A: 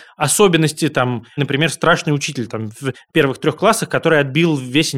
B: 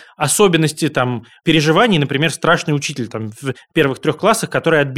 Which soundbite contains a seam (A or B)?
A